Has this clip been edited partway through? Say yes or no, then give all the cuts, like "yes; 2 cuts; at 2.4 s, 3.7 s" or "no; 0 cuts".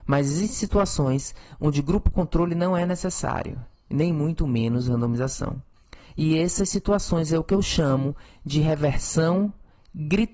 no; 0 cuts